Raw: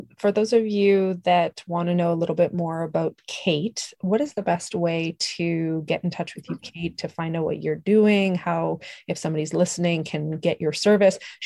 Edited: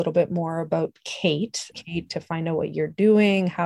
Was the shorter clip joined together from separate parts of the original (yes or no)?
yes